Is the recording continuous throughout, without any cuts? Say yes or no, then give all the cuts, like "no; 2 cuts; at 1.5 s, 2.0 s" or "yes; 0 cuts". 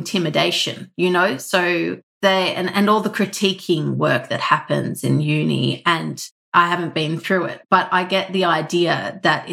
yes; 0 cuts